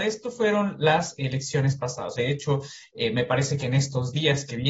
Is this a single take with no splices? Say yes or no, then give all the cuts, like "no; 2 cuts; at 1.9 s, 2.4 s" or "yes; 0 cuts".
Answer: no; 1 cut; at 2.2 s